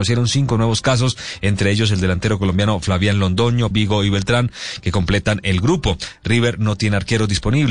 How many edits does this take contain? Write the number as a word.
one